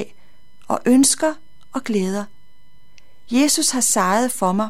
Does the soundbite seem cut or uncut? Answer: uncut